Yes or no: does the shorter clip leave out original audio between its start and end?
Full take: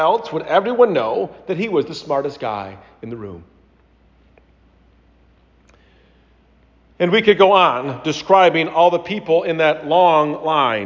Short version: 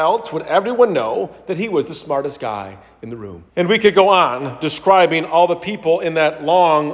yes